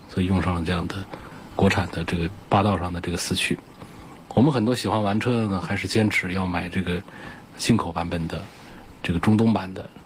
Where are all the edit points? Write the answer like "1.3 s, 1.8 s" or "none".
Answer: none